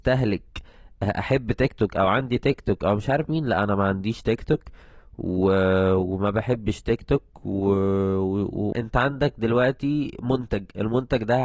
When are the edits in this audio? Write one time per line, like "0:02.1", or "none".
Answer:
0:08.7